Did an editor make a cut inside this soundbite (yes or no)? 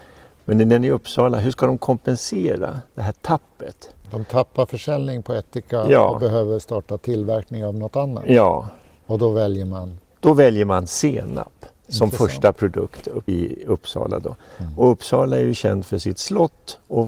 yes